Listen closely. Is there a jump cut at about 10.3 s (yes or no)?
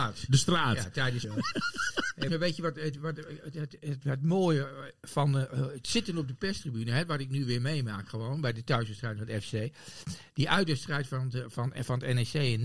no